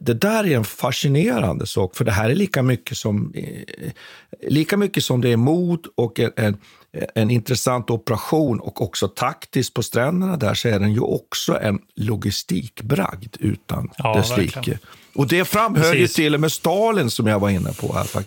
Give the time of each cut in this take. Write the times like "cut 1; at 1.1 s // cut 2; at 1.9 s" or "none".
none